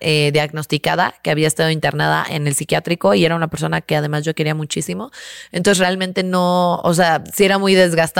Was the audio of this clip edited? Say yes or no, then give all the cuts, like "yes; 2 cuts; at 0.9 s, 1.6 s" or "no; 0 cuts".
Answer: no; 0 cuts